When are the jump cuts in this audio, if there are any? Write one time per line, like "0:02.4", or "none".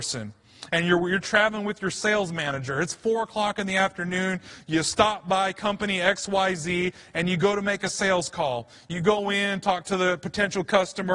none